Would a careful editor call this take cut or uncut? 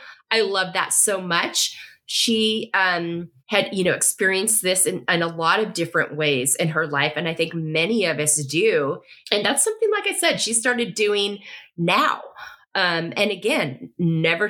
cut